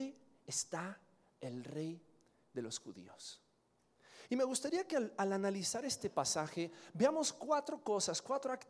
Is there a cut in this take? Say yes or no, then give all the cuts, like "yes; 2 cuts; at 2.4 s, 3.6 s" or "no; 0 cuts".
no; 0 cuts